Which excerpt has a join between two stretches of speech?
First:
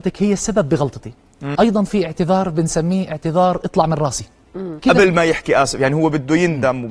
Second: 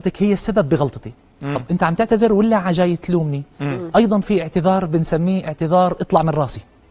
first; 2 cuts; at 1.6 s, 4.8 s

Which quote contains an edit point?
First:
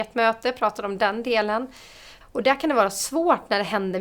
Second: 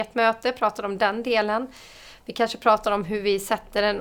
first; 1 cut; at 2.2 s

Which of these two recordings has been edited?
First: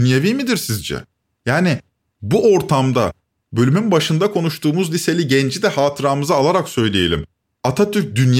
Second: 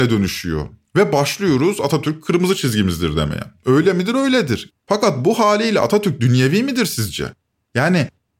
second; 1 cut; at 4.7 s

